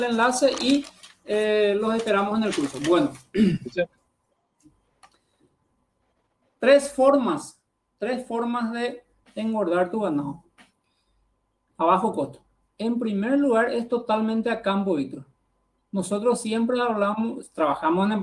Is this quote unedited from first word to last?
yes; 0 cuts

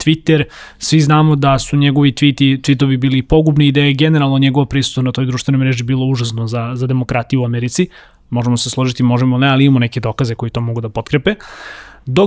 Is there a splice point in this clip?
no; 0 cuts

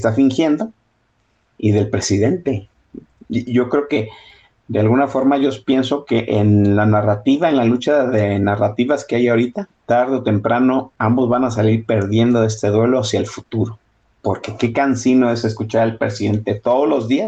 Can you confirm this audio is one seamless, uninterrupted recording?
no; 1 cut; at 9.7 s

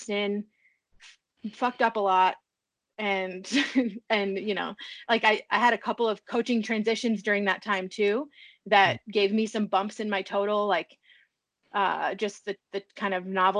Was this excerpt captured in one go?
yes; 0 cuts

